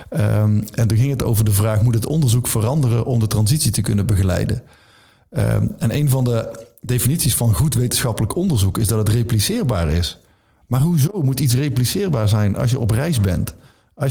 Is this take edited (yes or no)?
no